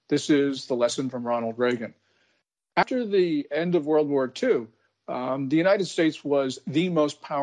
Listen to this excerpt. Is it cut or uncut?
uncut